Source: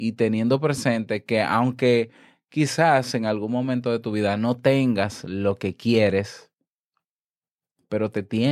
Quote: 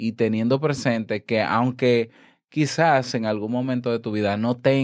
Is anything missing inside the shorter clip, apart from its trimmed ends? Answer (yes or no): no